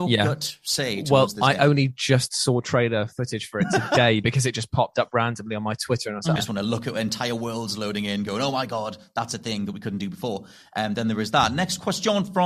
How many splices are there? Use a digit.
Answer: 1